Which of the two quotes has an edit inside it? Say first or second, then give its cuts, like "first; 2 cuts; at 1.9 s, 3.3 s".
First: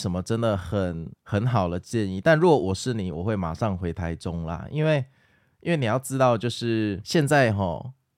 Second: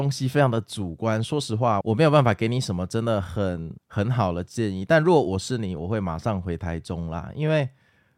second; 1 cut; at 1.8 s